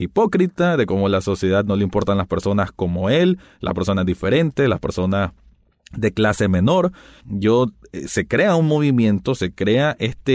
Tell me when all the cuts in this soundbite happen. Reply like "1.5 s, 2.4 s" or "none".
7.2 s